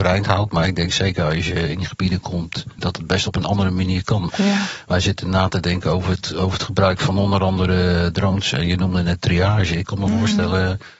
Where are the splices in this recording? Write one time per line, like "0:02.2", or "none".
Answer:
0:02.8
0:04.3